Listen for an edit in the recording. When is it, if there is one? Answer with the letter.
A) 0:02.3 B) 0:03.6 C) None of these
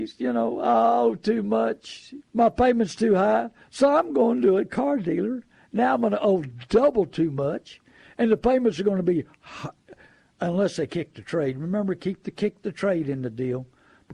A